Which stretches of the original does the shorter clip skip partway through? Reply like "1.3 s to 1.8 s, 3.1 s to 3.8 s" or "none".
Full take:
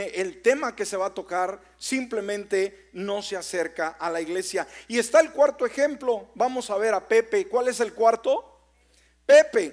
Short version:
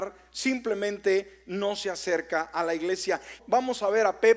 4.9 s to 6.3 s